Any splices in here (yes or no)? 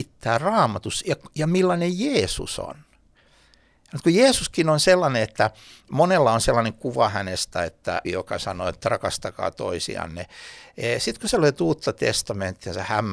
yes